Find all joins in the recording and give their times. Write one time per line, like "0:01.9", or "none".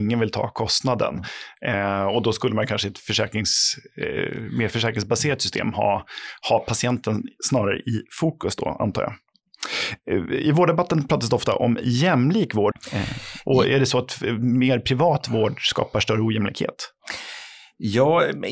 0:12.7